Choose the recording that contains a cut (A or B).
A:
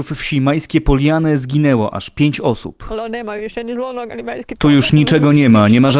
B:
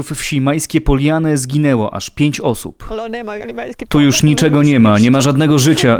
B